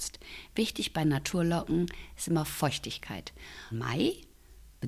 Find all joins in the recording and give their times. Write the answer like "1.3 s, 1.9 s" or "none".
3.7 s